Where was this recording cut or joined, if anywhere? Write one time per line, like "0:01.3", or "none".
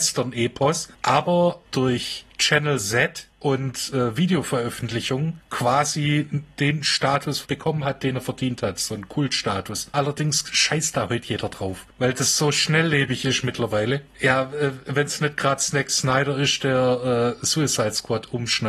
0:01.0
0:09.9

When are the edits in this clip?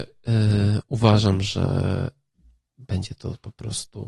none

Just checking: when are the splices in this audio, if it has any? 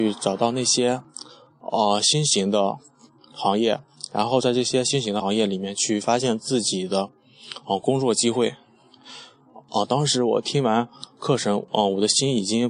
none

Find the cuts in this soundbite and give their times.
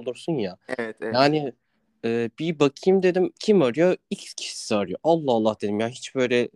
none

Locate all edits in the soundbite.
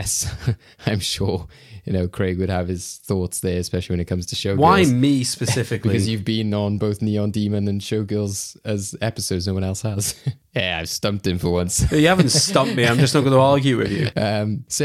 none

